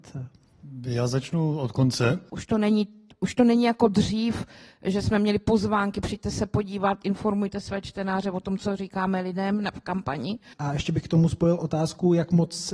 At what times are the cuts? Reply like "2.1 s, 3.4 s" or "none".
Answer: 2.3 s, 10.5 s